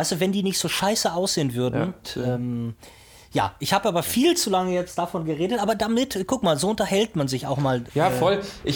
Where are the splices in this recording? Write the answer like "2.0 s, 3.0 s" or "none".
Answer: 2.0 s